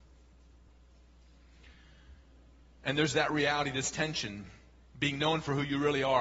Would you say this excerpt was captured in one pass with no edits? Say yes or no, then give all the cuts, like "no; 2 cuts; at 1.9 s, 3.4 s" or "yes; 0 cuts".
yes; 0 cuts